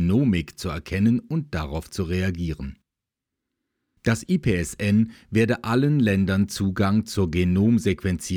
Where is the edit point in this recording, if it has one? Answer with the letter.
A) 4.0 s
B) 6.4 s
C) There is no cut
A